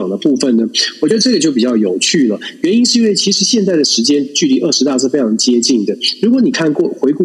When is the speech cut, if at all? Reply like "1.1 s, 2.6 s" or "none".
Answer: none